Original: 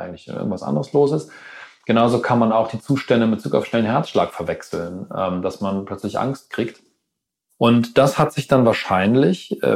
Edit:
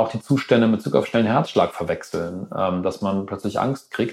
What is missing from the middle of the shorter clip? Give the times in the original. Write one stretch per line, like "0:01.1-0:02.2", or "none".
none